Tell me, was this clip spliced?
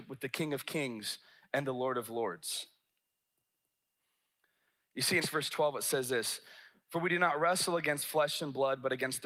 yes; 1 cut; at 5.2 s

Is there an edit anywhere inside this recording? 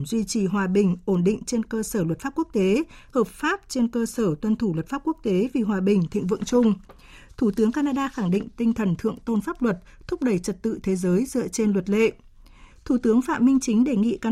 yes; 2 cuts; at 3.1 s, 12.7 s

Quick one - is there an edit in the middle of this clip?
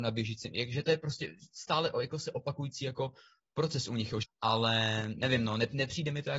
yes; 1 cut; at 4.2 s

